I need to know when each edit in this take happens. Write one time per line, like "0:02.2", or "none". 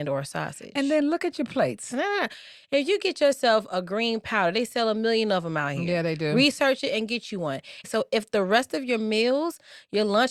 0:01.9
0:07.8